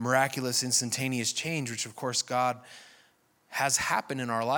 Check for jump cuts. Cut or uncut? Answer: uncut